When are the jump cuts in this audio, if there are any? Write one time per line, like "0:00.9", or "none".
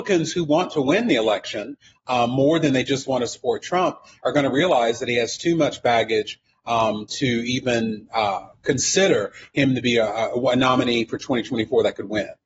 none